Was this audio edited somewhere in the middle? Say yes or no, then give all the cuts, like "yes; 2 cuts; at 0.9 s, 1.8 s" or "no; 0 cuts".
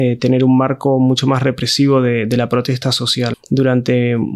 yes; 1 cut; at 3.3 s